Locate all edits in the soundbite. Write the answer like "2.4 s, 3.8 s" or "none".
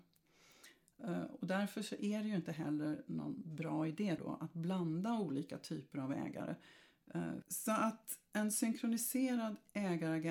4.2 s, 7.4 s